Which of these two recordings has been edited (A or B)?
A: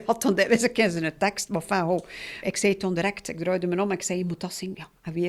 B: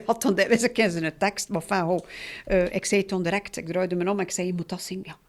A